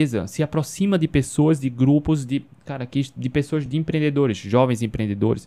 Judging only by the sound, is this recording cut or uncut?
uncut